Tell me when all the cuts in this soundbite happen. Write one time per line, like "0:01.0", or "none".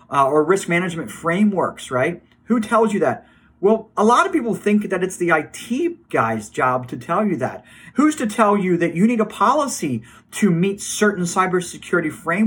0:07.9